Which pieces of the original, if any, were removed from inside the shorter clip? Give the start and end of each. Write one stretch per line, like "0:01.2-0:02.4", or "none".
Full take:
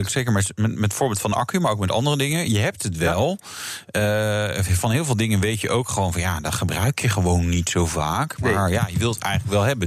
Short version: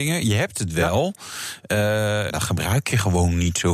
0:04.5-0:06.4